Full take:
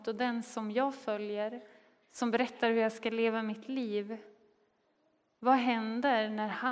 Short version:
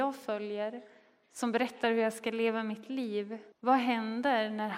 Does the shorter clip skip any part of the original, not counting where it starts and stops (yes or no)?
yes